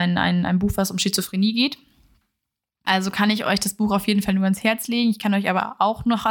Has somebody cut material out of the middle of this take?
yes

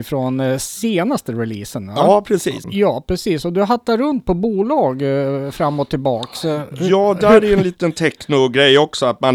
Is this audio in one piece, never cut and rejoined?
no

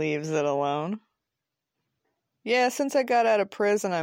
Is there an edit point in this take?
no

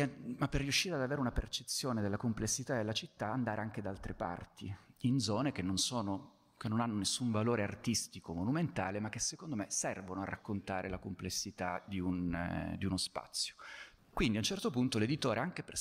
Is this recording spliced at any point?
yes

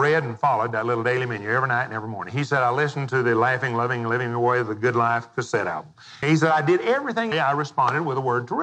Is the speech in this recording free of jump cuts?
no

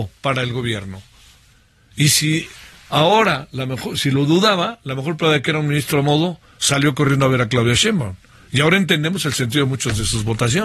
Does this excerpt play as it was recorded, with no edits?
yes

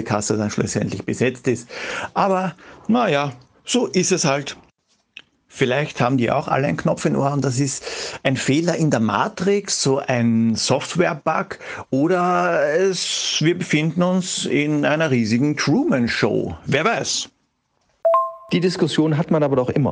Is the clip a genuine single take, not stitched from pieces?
yes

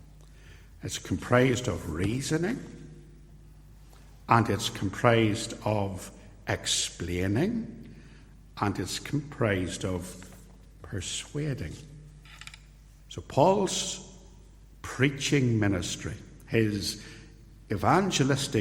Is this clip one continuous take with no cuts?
no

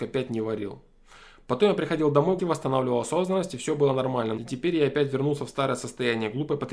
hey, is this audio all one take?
no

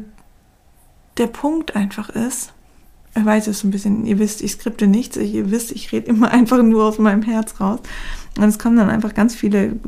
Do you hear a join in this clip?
no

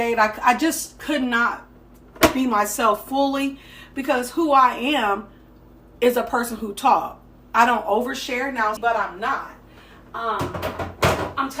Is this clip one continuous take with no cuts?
no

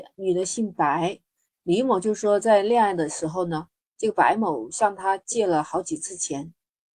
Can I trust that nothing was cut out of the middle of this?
no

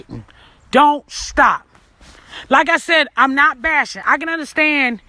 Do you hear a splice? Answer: yes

